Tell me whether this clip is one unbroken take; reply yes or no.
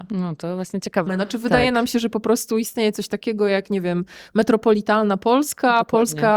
no